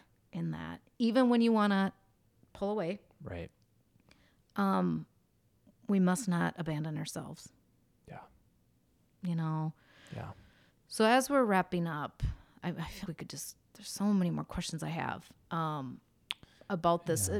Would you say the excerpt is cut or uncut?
cut